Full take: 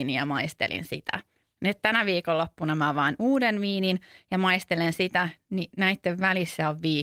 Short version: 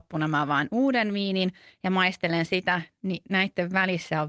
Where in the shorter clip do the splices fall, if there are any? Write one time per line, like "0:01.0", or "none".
none